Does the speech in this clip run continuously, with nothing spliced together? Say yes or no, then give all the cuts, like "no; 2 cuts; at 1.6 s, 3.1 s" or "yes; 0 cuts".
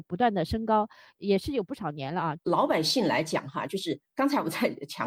no; 1 cut; at 2.4 s